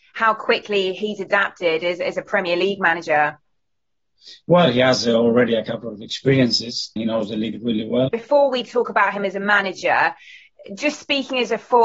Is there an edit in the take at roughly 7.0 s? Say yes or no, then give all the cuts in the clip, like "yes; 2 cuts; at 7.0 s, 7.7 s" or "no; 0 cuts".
yes; 2 cuts; at 7.0 s, 8.1 s